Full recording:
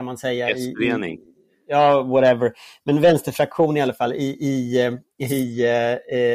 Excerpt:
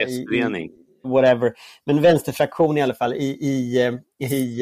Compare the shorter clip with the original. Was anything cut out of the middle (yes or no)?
yes